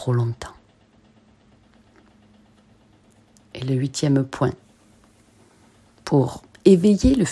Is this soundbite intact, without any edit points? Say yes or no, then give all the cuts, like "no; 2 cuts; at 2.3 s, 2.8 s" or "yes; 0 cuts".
yes; 0 cuts